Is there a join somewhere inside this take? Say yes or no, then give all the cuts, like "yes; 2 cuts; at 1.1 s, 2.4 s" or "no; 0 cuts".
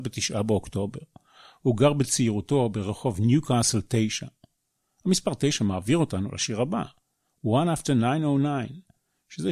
no; 0 cuts